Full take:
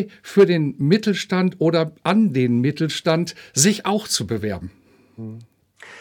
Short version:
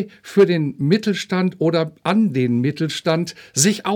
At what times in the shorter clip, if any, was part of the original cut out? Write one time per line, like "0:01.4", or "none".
none

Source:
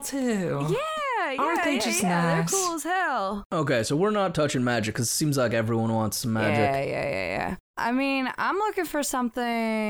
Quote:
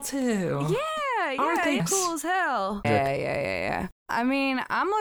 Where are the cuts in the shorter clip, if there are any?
0:01.8
0:02.8

